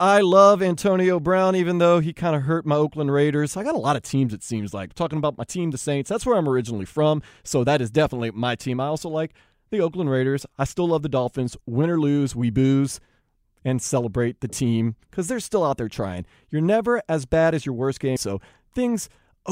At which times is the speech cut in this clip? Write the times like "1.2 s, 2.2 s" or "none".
18.2 s